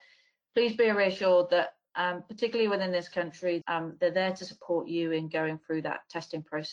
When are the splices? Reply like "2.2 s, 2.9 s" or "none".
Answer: 3.6 s